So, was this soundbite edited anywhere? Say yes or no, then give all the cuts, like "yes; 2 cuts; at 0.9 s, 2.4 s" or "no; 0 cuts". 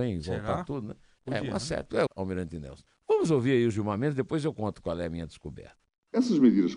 yes; 1 cut; at 2.1 s